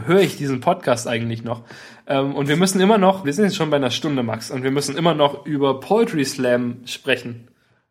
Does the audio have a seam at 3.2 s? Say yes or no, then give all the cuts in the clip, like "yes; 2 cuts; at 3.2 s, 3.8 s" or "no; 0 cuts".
yes; 1 cut; at 3.2 s